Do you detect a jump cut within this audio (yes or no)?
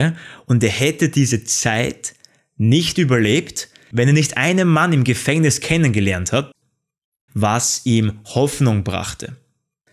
yes